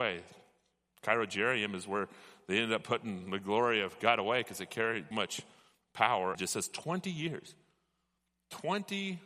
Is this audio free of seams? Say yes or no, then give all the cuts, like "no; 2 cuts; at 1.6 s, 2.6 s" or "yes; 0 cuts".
no; 2 cuts; at 5.1 s, 6.3 s